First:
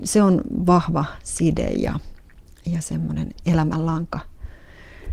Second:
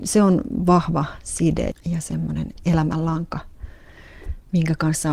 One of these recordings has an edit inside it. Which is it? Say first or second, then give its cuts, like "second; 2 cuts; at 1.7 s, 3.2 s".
second; 1 cut; at 1.7 s